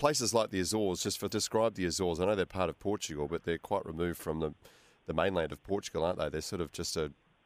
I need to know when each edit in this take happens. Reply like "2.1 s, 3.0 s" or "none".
1.3 s

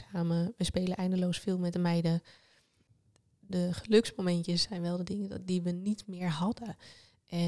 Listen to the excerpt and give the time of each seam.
none

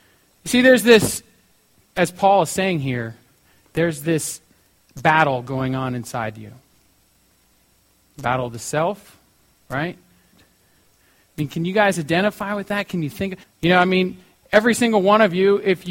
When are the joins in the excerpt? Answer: 10.3 s, 13.4 s

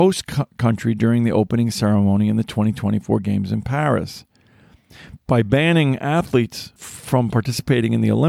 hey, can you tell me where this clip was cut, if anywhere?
5.2 s

